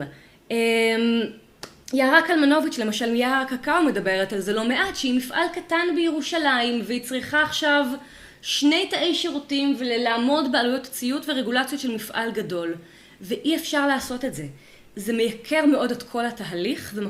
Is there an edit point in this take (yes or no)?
no